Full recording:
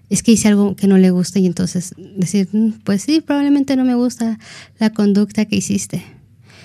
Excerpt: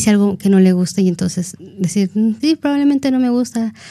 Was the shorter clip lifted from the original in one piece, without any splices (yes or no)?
no